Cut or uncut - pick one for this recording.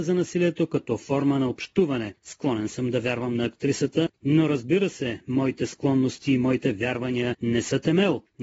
uncut